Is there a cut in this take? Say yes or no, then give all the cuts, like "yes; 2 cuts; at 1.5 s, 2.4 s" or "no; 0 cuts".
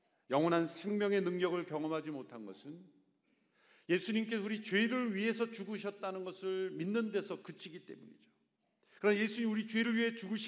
no; 0 cuts